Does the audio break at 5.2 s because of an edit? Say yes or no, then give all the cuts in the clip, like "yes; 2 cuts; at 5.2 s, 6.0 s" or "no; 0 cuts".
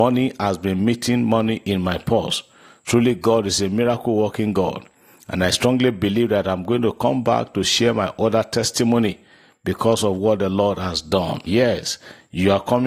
no; 1 cut; at 11.5 s